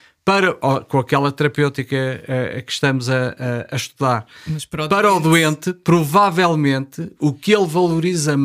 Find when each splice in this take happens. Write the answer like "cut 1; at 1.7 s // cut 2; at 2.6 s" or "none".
none